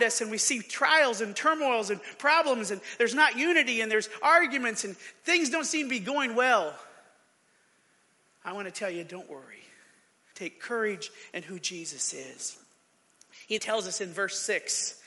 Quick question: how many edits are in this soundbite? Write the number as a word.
two